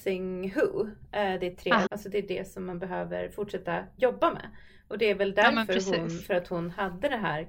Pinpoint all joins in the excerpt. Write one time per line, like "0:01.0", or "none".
0:01.9